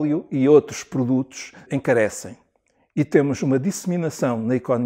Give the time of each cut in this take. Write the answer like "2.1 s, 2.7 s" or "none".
1.7 s

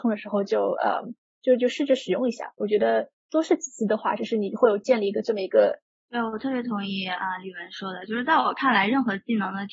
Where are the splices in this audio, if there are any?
6.0 s

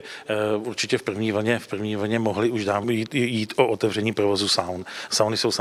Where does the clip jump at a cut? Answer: 2.8 s

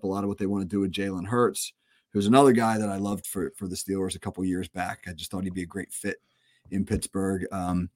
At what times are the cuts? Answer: none

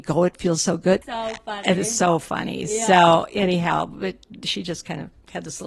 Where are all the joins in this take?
1.0 s

